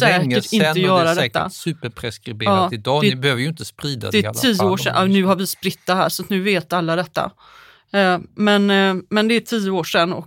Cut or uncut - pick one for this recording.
uncut